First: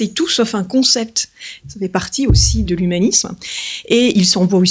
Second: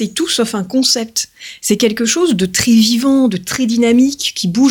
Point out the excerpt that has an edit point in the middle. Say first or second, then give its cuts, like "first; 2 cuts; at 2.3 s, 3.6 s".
first; 2 cuts; at 1.6 s, 2.6 s